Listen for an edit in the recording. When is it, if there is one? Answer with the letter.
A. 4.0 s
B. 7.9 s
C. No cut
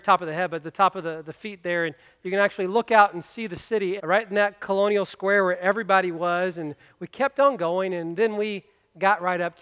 A